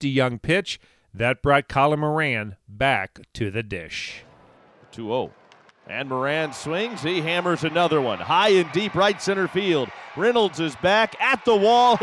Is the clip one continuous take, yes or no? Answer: yes